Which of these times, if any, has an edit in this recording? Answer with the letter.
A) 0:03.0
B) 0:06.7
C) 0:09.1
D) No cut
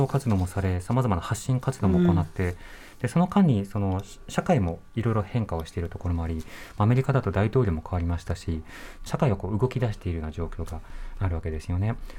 C